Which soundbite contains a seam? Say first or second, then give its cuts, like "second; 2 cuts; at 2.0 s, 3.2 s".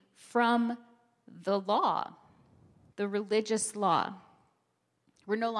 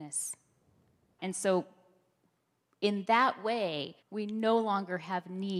second; 2 cuts; at 1.2 s, 4.0 s